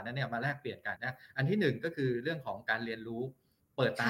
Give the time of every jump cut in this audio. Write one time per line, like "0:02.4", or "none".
0:01.0

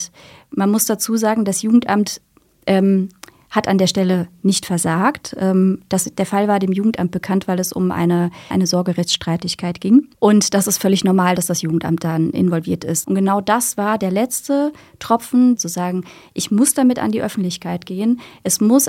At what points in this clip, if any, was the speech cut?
0:13.0
0:15.6

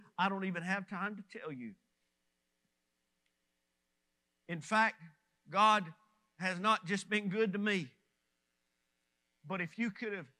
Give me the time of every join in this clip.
none

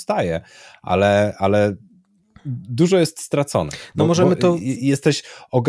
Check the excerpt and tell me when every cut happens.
none

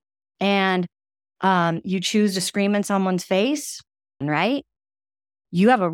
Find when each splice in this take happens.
0:04.2

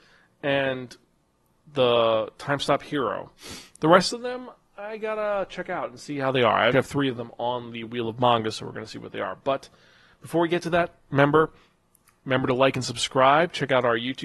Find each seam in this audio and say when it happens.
0:06.7

